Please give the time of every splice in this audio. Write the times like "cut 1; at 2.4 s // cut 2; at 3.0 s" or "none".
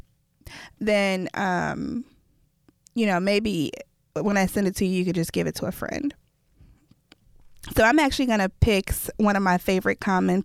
none

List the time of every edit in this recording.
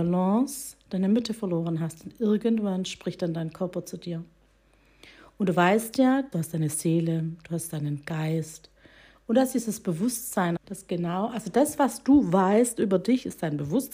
cut 1; at 6.3 s // cut 2; at 10.6 s

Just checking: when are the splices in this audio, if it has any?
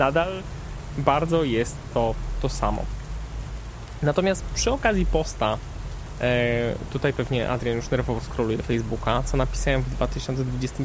none

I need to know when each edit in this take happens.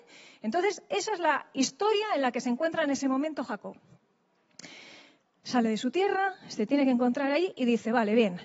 none

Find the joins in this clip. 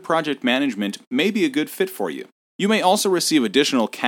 cut 1; at 2.4 s

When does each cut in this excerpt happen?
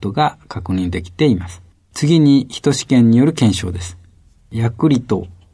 cut 1; at 1.8 s

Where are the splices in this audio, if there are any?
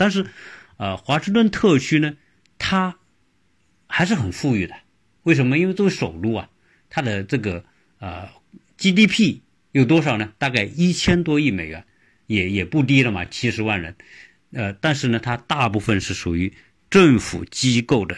none

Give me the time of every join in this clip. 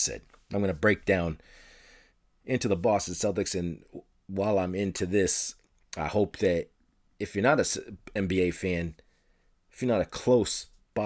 none

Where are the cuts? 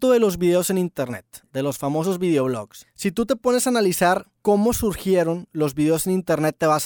none

